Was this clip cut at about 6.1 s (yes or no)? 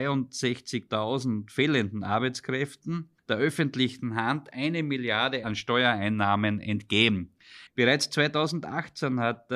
no